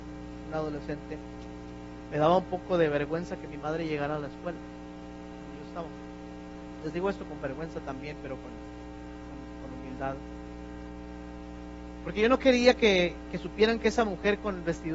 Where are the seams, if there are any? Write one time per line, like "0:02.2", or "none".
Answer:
none